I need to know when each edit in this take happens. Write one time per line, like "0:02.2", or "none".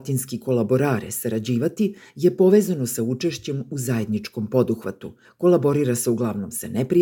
0:05.2